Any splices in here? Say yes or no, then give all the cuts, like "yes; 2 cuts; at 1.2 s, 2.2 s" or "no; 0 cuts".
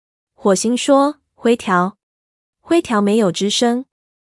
yes; 1 cut; at 2.1 s